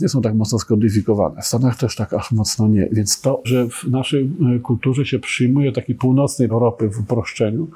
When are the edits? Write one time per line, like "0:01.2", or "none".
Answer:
0:03.4
0:06.5